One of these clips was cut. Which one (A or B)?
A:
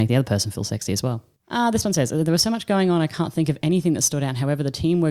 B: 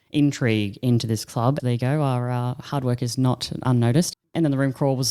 B